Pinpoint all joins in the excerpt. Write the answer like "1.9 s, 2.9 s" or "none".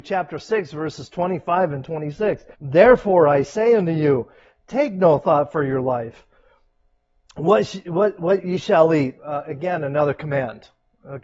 2.5 s, 9.2 s